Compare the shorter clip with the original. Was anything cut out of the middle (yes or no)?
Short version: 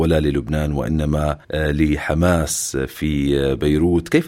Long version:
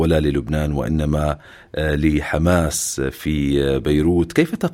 yes